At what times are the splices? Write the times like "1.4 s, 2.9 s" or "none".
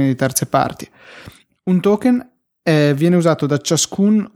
none